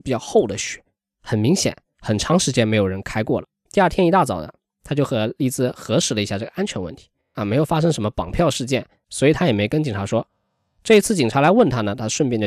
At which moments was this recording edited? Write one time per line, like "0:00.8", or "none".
0:03.7
0:07.3
0:09.0